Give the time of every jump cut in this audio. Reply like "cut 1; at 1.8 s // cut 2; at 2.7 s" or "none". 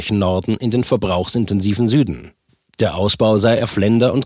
none